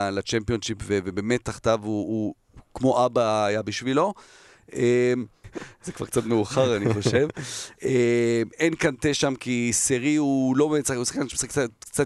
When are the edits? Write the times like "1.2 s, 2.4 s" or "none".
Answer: 5.4 s

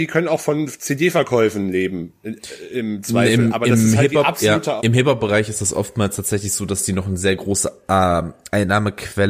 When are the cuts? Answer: 4.8 s

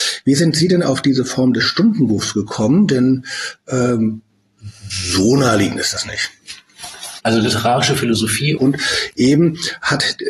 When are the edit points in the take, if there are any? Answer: 7.2 s, 8.6 s

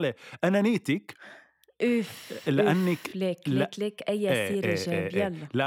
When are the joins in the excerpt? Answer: none

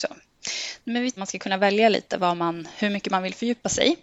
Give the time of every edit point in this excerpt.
1.2 s

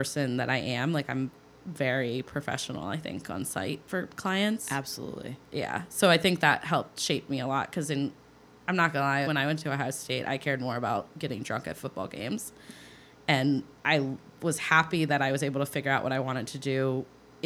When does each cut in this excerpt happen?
9.2 s

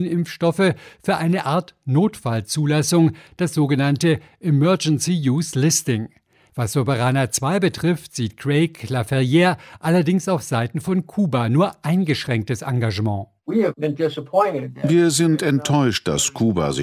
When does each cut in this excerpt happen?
6.5 s

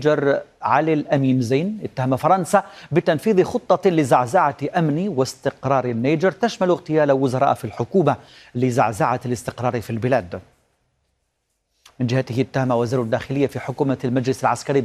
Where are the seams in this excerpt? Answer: none

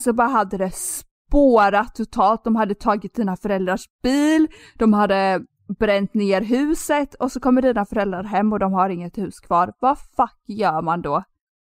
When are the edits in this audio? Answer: none

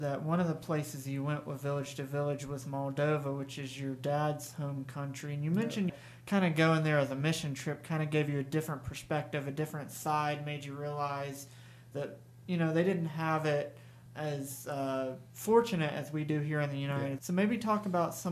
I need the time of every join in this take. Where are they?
5.9 s, 17.2 s

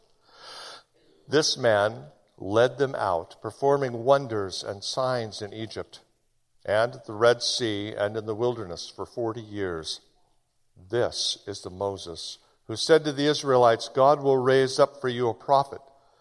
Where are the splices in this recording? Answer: none

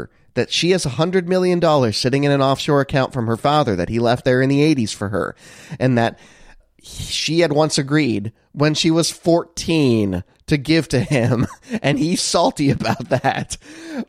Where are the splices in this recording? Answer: 12.2 s

